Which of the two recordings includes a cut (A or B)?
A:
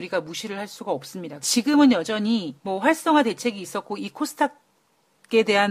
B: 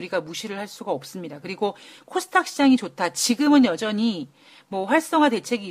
A